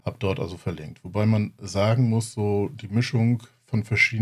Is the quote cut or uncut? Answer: uncut